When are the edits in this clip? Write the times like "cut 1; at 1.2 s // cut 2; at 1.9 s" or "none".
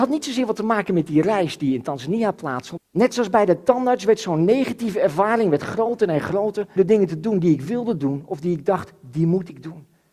cut 1; at 2.8 s // cut 2; at 6.8 s